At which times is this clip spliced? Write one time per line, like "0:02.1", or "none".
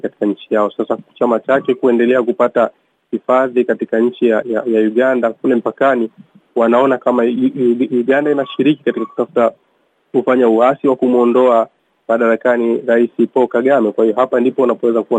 0:04.4